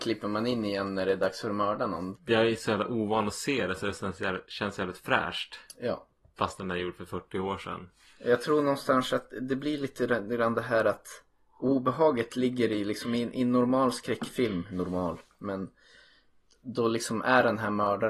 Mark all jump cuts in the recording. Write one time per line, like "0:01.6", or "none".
0:02.2